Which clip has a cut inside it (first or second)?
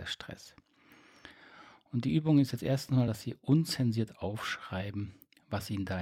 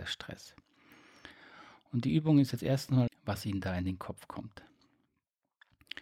second